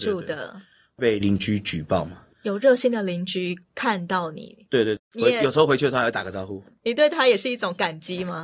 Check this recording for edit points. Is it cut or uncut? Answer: cut